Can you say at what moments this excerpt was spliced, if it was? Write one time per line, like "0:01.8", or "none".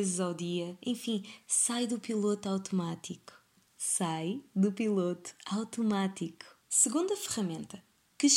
0:06.6